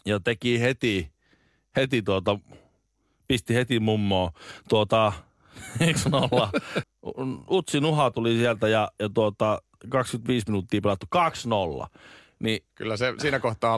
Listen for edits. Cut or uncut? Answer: cut